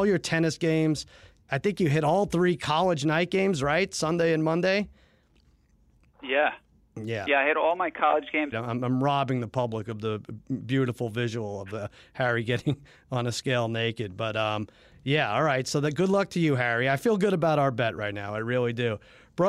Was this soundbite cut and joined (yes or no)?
yes